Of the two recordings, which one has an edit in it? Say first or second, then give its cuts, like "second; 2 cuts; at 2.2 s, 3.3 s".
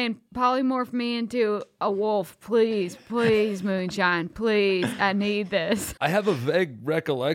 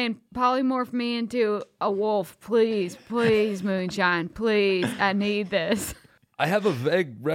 first; 1 cut; at 6.0 s